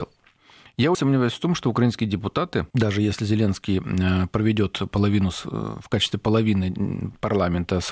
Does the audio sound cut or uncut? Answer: cut